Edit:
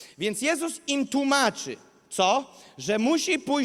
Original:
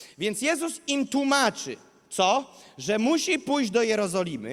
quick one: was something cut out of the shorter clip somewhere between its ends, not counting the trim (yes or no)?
no